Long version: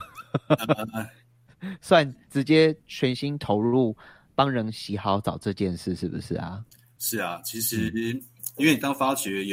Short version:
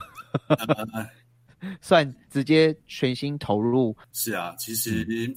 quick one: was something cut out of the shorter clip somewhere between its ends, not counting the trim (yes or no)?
yes